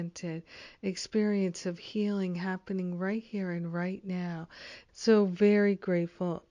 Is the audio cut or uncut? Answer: cut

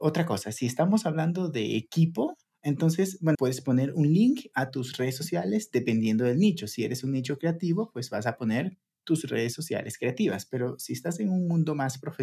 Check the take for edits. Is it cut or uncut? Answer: cut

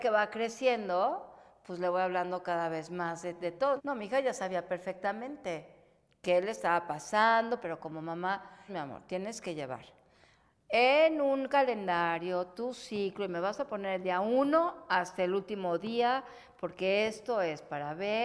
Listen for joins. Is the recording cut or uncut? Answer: cut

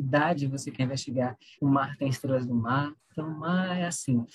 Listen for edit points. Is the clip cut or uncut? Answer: cut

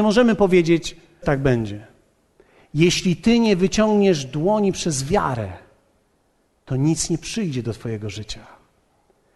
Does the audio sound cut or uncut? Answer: cut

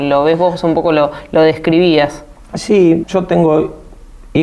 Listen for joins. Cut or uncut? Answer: cut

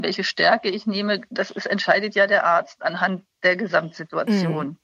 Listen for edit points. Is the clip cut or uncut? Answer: uncut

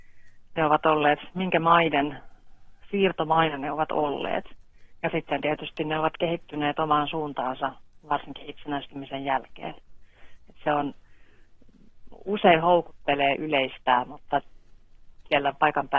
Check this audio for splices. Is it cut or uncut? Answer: uncut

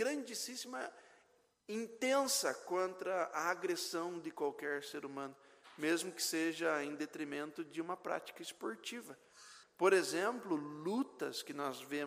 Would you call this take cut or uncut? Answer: cut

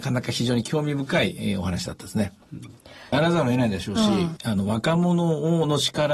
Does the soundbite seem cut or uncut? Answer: cut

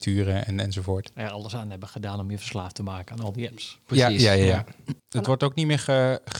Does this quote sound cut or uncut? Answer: cut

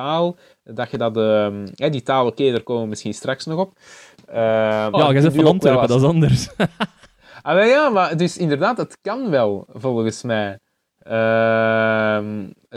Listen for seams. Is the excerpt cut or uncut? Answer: cut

